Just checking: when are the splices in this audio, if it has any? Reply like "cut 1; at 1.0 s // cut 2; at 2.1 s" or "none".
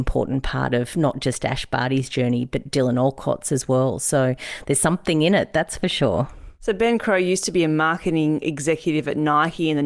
none